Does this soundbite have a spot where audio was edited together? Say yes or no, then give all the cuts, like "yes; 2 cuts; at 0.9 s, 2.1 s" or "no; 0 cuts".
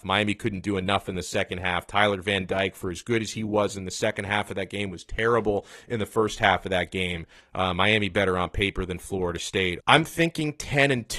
yes; 2 cuts; at 7.4 s, 9.8 s